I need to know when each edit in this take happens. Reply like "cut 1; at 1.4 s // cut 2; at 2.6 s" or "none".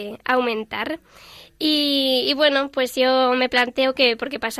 none